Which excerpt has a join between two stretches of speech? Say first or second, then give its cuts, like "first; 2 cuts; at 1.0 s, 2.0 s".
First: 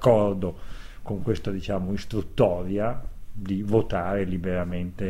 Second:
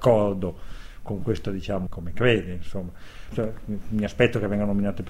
second; 2 cuts; at 1.9 s, 3.3 s